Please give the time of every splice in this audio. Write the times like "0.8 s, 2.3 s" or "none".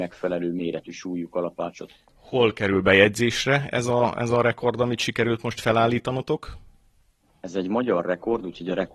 none